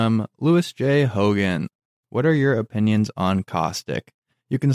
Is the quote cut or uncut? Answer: uncut